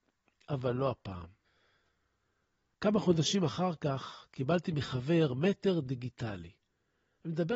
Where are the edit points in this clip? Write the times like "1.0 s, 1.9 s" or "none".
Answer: none